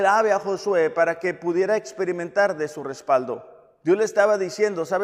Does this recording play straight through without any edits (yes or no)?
yes